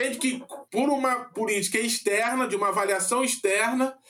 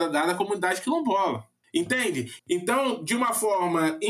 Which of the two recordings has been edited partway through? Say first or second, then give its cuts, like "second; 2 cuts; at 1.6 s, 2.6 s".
second; 1 cut; at 2.4 s